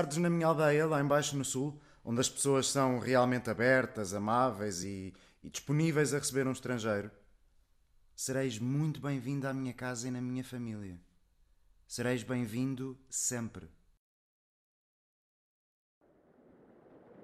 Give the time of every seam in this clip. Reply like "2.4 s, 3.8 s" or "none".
none